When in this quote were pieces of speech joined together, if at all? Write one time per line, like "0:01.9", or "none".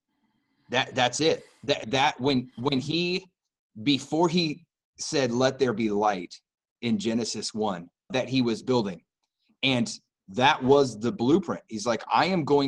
0:01.8
0:08.1